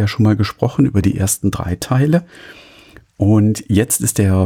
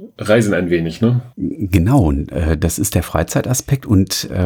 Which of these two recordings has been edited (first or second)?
second